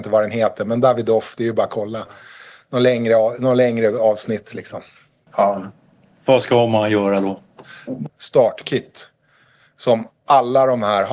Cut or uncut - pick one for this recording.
cut